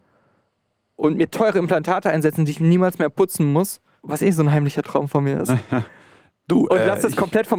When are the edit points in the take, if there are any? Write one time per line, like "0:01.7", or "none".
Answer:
none